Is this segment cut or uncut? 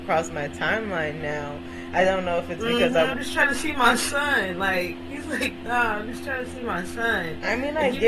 cut